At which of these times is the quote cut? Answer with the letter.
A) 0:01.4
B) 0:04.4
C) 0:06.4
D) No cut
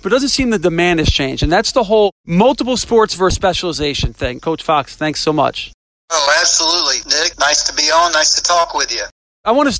B